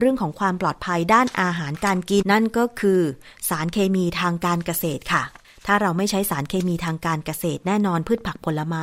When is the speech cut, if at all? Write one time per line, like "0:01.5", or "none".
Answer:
0:02.2